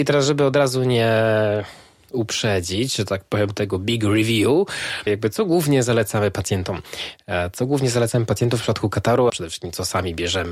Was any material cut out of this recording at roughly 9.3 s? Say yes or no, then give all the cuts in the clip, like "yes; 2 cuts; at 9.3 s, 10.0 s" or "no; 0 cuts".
yes; 2 cuts; at 5.1 s, 9.3 s